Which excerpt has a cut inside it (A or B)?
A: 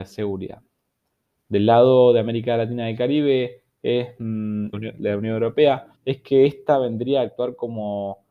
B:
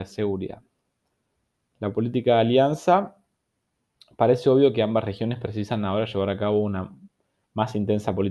A